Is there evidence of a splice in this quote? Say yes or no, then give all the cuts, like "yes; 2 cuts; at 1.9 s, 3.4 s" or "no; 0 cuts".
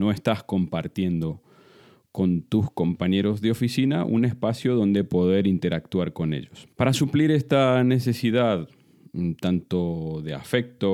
yes; 1 cut; at 6.7 s